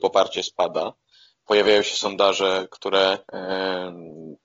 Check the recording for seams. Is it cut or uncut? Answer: cut